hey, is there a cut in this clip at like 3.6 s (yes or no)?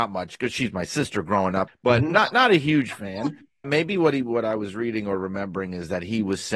yes